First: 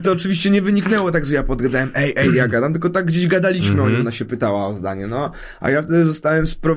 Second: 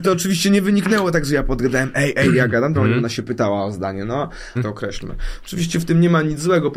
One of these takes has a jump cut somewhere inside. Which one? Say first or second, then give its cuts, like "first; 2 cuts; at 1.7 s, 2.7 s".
second; 2 cuts; at 2.7 s, 4.6 s